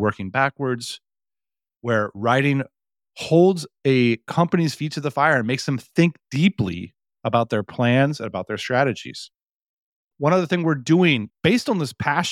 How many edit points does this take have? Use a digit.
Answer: 2